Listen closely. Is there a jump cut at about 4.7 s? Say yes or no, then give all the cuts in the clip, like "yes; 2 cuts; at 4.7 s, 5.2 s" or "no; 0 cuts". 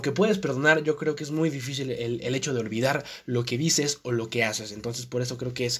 no; 0 cuts